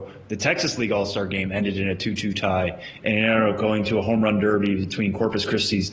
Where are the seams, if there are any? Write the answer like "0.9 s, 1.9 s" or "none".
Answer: none